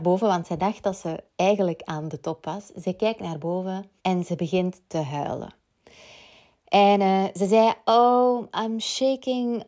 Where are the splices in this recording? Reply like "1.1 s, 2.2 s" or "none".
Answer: 4.0 s